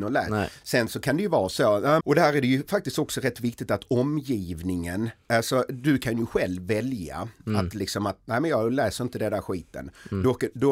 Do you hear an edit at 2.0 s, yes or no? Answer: yes